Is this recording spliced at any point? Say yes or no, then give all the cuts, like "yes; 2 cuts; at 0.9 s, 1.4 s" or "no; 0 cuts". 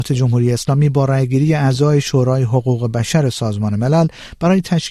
no; 0 cuts